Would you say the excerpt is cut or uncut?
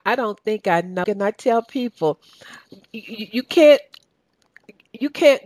cut